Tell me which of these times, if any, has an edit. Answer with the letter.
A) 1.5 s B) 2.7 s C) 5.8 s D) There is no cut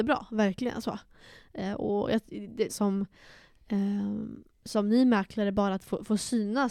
B